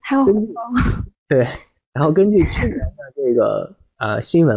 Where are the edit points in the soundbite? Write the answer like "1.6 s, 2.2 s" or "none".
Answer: none

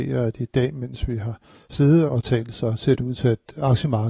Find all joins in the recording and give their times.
2.1 s

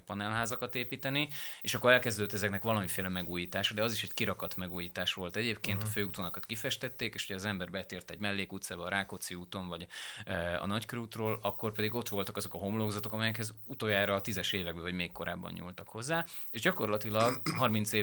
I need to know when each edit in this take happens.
none

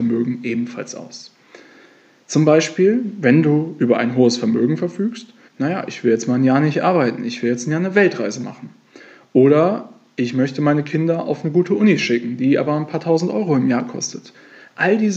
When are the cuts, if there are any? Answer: 5.5 s

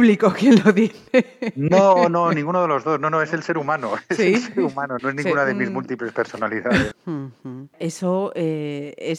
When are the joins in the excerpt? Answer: 5.0 s, 6.9 s

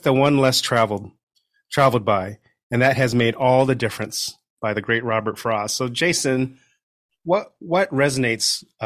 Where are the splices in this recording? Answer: none

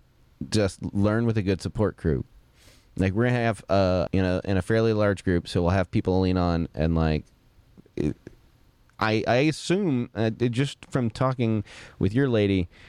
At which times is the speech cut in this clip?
4.1 s

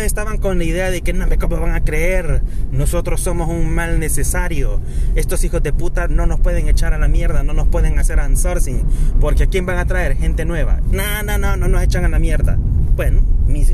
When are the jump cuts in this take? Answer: 10.8 s

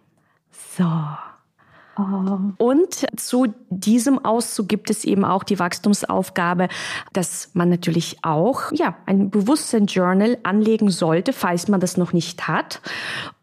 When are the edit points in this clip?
2.6 s, 8.7 s

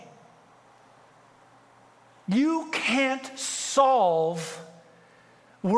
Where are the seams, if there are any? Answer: none

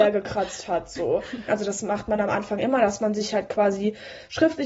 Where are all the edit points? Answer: 1.5 s

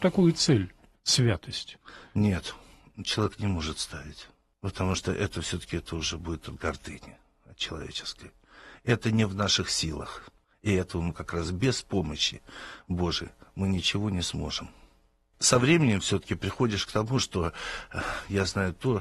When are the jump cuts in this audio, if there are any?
none

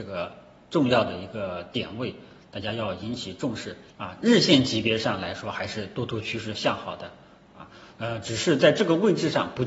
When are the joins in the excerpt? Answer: 3.9 s

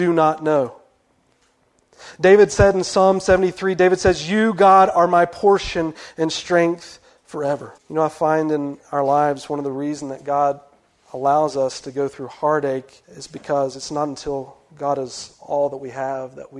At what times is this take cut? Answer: 7.8 s, 13.0 s

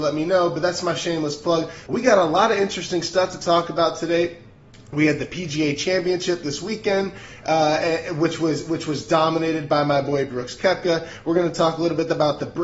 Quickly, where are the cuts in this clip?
1.9 s

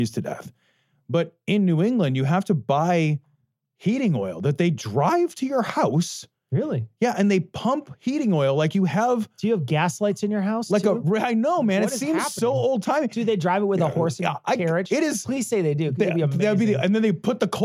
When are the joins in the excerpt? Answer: none

